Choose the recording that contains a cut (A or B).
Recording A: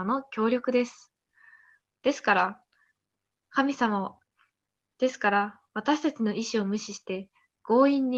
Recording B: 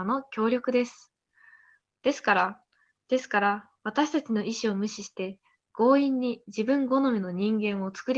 B